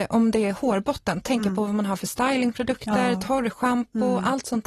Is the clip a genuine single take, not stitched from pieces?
yes; 0 cuts

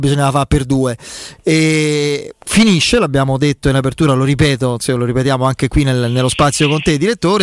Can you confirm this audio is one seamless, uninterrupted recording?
no; 1 cut; at 2.4 s

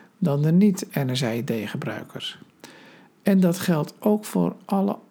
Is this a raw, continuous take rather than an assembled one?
yes; 0 cuts

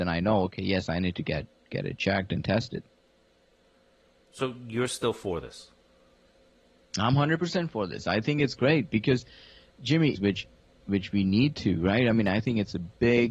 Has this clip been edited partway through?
yes; 1 cut; at 10.2 s

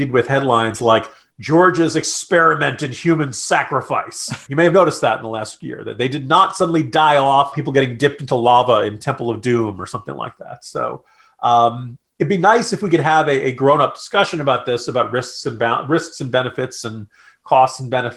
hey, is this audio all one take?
no; 2 cuts; at 4.5 s, 7.5 s

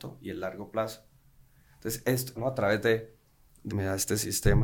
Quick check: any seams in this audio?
yes; 2 cuts; at 2.4 s, 3.7 s

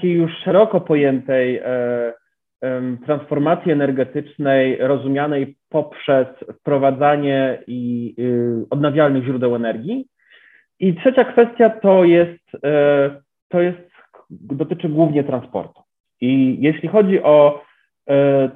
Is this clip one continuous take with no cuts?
yes; 0 cuts

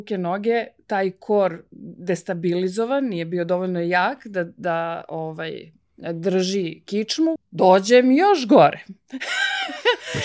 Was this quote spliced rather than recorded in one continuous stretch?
yes; 1 cut; at 7.4 s

